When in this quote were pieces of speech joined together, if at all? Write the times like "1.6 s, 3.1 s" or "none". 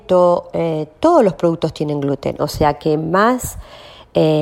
2.4 s